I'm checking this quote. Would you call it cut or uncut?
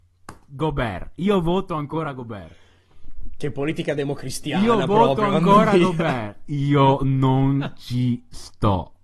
uncut